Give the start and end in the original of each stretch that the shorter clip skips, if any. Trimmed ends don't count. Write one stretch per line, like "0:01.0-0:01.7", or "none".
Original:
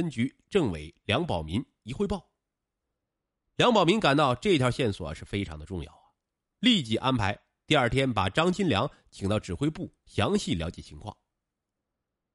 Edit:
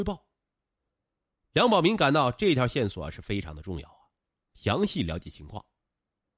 0:06.5-0:10.0